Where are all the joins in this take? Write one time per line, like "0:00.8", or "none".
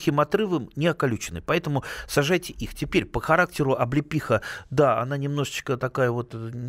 none